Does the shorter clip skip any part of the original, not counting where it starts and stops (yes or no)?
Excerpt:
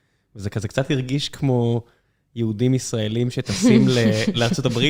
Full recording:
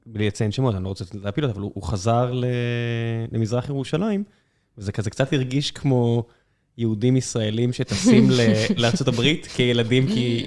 no